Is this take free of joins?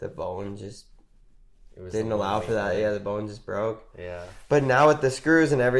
yes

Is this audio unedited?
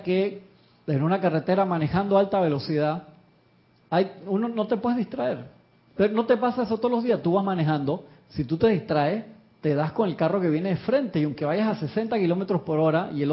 yes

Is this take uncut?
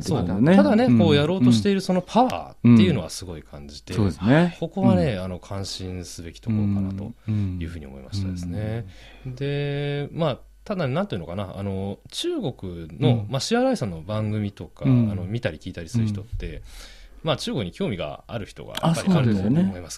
yes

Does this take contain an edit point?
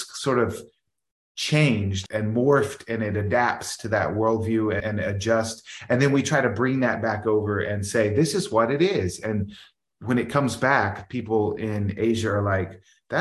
yes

